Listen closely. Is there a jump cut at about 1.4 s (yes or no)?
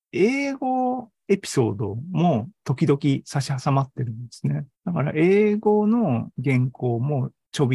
no